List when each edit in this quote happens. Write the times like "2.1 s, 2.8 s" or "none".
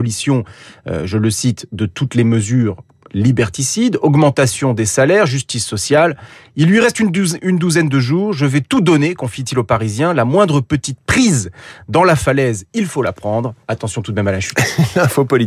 13.6 s